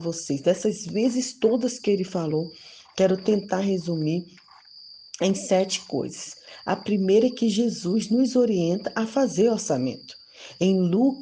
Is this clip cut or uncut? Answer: uncut